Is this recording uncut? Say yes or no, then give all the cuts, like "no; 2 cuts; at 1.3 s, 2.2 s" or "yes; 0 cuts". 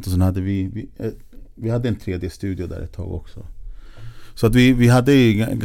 yes; 0 cuts